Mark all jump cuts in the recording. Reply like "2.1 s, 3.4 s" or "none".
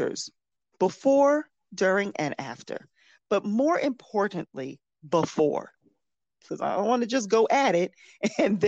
6.5 s